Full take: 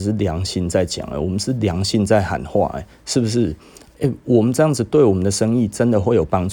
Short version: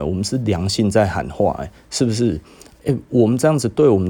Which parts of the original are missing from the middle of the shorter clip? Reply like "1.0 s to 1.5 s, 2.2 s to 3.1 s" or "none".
none